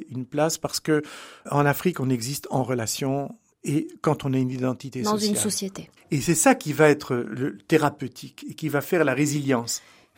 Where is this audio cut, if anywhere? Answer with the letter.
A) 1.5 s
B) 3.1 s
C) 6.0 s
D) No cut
C